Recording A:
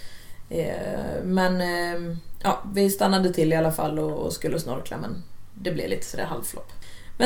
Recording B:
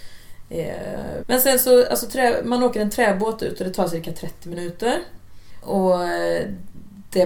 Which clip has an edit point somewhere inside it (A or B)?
B